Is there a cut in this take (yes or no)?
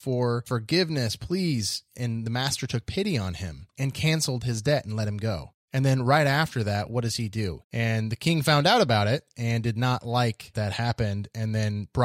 yes